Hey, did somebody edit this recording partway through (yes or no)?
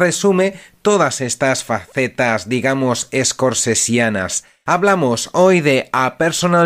no